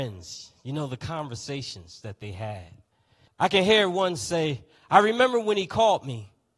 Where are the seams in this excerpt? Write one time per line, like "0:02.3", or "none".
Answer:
0:03.3

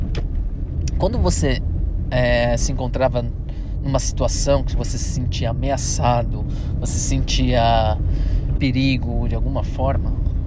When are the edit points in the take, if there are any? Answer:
0:08.6

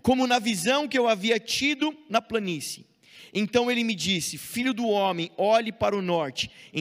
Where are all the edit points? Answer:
none

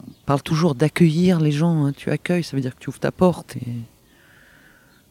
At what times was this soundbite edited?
0:03.5

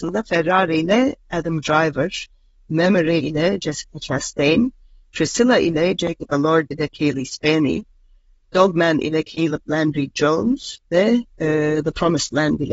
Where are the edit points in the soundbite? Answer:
none

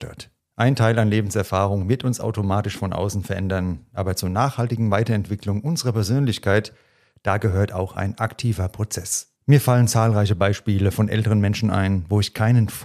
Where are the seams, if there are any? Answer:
0:09.4

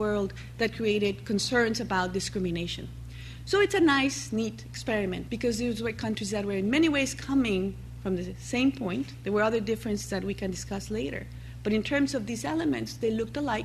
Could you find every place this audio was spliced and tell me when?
0:05.3

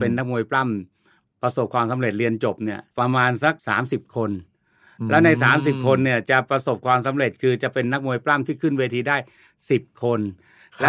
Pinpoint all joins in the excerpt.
0:03.6

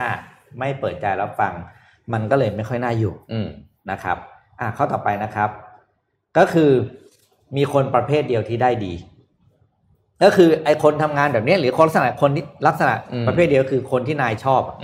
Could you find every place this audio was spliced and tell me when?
none

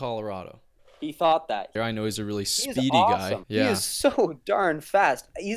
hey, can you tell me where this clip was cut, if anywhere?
0:01.8
0:03.4

